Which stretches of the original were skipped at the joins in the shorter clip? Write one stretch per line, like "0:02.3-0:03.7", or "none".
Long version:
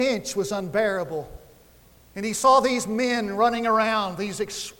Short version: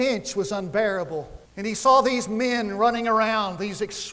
0:01.5-0:02.0